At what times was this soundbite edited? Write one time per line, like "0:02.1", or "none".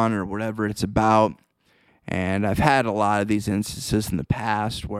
0:01.9